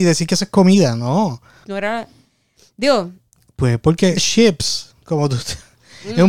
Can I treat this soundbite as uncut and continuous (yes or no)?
no